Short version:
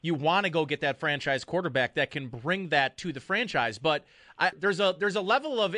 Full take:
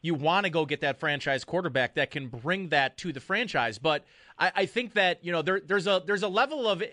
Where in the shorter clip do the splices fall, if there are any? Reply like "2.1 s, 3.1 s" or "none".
4.5 s